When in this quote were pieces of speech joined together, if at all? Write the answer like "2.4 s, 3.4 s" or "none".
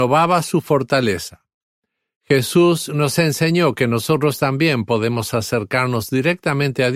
none

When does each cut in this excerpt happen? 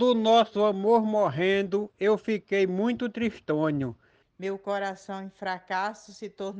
4.2 s

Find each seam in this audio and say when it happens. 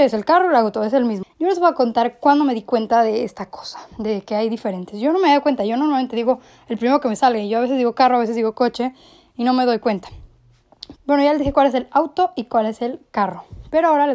1.2 s, 11.0 s

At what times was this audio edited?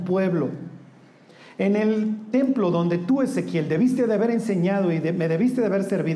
none

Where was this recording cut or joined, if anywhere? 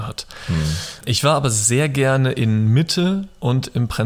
1.0 s

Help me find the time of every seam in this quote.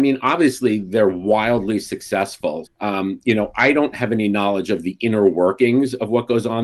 2.7 s

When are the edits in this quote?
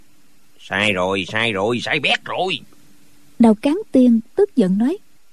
none

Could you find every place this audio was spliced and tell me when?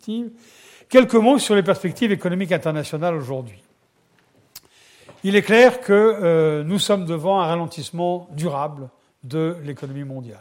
none

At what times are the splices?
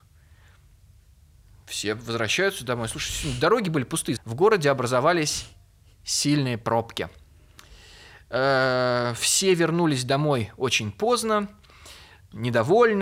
4.2 s

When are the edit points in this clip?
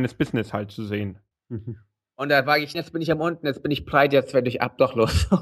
1.3 s, 2.7 s

